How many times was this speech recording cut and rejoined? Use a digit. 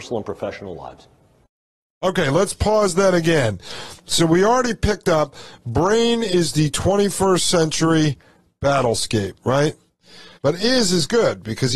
1